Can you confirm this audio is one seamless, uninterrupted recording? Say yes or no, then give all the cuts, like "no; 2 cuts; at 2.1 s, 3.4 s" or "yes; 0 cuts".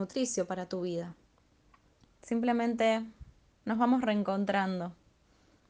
no; 1 cut; at 2.1 s